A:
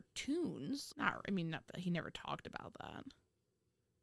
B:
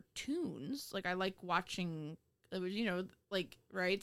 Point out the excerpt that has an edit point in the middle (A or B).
A